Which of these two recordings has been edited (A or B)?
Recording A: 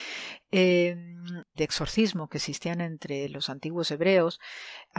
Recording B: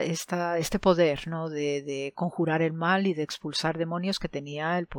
A